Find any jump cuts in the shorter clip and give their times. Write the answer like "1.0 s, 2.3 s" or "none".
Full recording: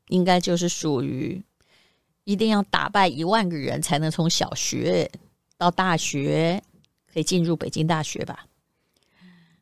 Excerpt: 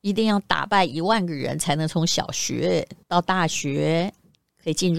3.0 s